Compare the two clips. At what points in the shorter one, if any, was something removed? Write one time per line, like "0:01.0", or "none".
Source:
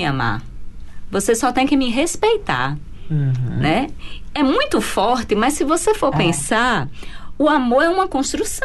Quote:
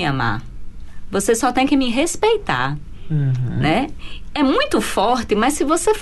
none

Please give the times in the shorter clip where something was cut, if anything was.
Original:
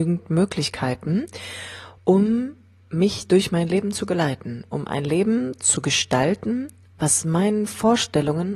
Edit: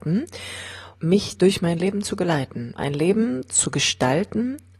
0:00.9
0:02.8

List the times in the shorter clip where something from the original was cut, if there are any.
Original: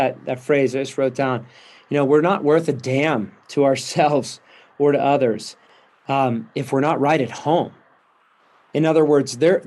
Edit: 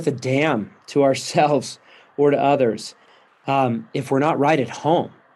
none

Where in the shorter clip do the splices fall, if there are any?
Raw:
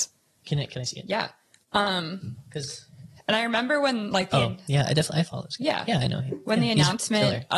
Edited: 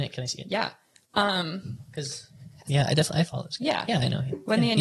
0:02.7

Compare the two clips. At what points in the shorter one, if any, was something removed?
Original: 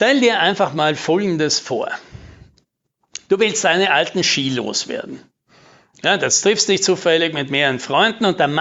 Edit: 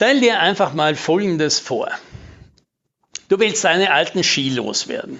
none

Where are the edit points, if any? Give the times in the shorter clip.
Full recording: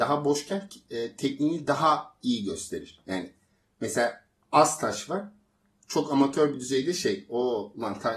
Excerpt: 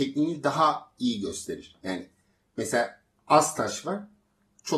none

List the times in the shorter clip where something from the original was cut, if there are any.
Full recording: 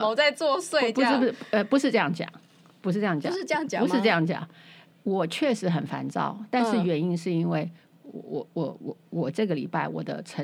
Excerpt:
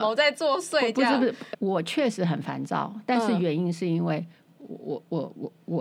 0:01.5

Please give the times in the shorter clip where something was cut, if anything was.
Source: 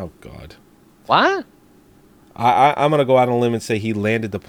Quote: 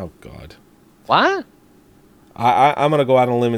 none

